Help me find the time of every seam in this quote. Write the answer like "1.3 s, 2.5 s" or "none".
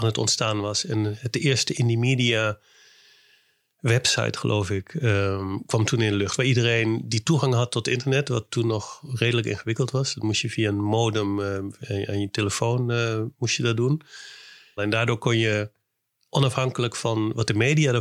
14.8 s